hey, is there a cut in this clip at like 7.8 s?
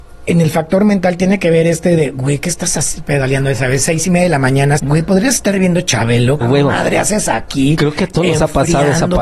no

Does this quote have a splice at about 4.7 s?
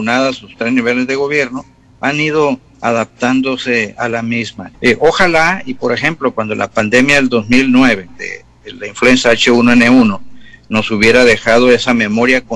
yes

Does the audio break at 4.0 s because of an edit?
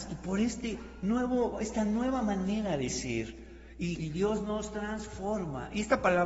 yes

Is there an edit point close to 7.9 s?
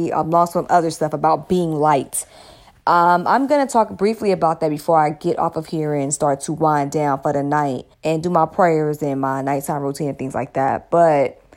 yes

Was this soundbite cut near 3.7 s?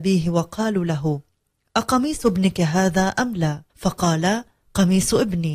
yes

